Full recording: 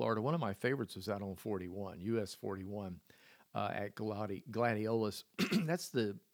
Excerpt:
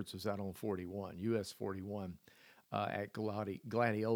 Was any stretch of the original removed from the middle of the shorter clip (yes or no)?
no